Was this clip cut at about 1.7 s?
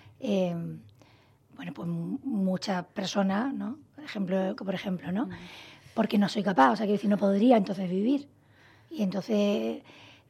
no; 1 cut; at 4.6 s

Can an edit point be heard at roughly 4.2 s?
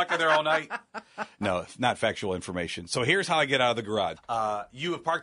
yes; 1 cut; at 4.2 s

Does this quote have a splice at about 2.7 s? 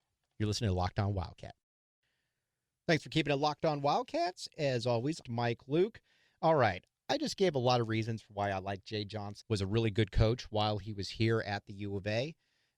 no; 2 cuts; at 5.2 s, 9.4 s

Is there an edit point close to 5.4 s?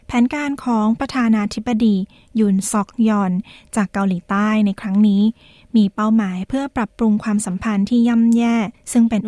no; 0 cuts

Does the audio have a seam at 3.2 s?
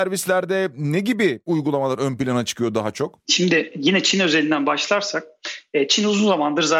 yes; 1 cut; at 3.2 s

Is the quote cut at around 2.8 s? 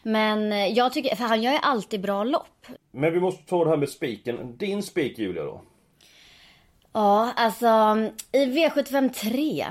yes; 1 cut; at 2.8 s

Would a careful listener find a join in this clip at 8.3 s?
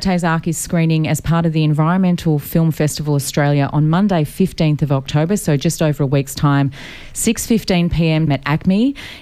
yes; 1 cut; at 8.3 s

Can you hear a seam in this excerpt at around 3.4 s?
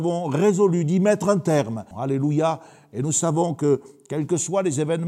no; 1 cut; at 1.9 s

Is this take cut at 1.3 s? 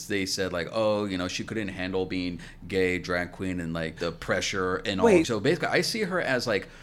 no; 2 cuts; at 4.0 s, 5.2 s

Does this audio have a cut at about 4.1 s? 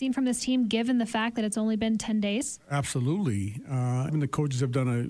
yes; 1 cut; at 4.1 s

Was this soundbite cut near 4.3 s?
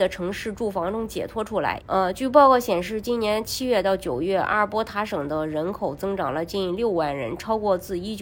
no; 1 cut; at 1.8 s

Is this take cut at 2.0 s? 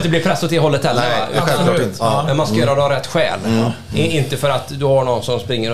yes; 1 cut; at 2.0 s

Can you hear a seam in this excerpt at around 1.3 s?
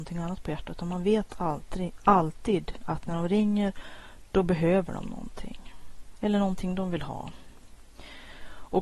no; 1 cut; at 6.2 s

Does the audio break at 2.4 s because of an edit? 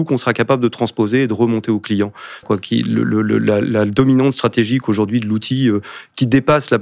yes; 1 cut; at 2.4 s

